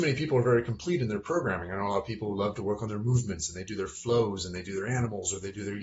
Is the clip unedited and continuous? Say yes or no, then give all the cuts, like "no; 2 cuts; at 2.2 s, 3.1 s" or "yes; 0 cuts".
yes; 0 cuts